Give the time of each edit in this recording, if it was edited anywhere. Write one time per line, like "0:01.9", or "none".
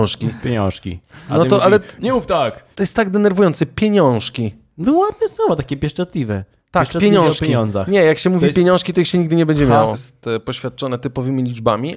0:02.7
0:09.9